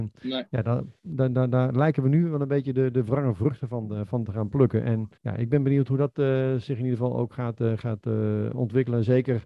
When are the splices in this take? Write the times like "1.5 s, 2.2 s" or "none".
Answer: 5.2 s